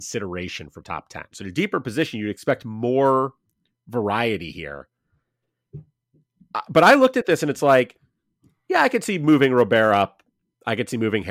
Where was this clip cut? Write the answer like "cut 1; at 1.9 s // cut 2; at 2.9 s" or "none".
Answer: cut 1; at 1.3 s